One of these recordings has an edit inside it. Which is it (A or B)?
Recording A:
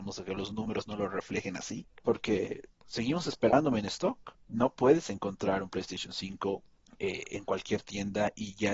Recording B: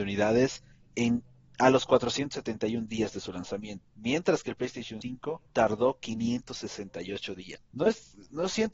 B